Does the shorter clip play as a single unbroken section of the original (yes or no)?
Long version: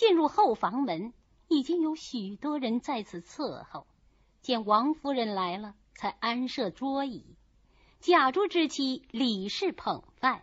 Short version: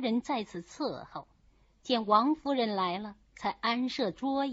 yes